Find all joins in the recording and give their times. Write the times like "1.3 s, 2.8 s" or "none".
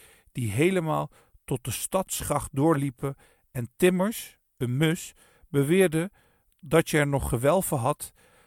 none